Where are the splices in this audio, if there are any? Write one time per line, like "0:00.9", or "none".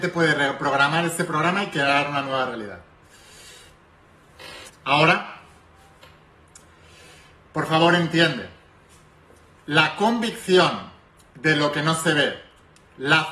0:04.7